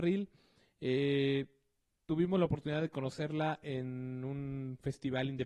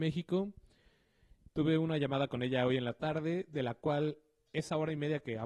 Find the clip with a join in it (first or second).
second